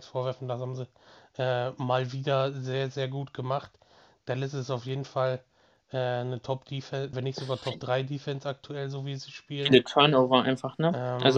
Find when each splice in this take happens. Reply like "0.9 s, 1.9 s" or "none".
7.1 s